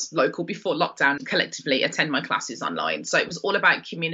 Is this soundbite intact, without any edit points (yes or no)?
no